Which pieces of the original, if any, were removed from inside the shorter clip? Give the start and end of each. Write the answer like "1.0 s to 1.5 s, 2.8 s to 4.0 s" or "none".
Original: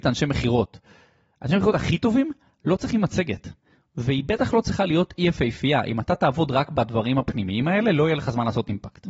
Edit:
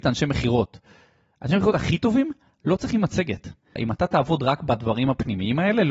3.8 s to 5.8 s